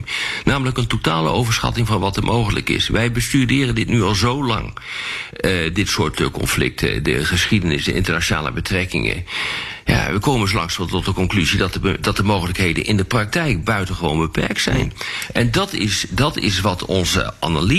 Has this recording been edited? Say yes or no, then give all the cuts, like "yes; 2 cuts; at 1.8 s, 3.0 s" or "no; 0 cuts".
no; 0 cuts